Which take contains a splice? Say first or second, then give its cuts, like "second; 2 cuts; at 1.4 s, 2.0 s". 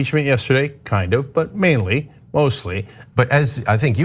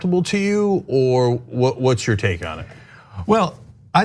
first; 1 cut; at 3.1 s